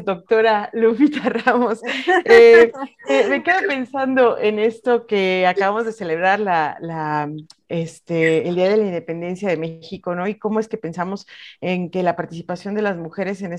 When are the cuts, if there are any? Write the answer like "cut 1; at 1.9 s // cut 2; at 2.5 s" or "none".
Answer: none